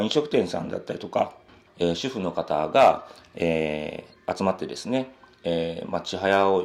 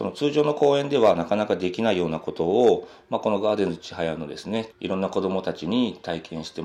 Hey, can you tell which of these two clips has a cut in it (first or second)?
second